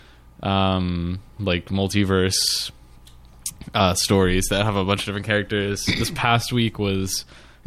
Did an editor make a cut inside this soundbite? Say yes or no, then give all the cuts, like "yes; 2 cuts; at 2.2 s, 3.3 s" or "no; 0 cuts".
no; 0 cuts